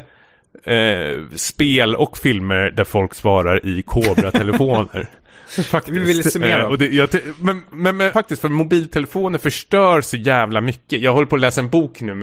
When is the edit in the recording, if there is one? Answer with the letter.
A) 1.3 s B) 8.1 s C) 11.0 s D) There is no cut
B